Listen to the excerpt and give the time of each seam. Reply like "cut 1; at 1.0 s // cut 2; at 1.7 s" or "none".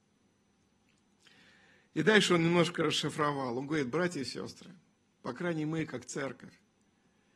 none